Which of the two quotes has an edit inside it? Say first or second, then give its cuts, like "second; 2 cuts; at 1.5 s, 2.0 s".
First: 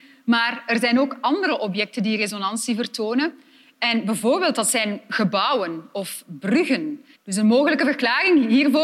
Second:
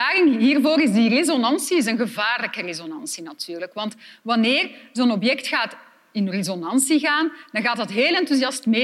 first; 1 cut; at 7.1 s